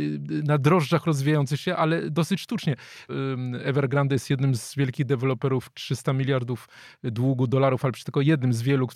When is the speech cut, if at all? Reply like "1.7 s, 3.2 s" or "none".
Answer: 3.1 s